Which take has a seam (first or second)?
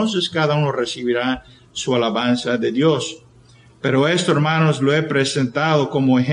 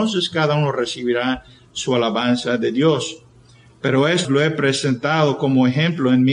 second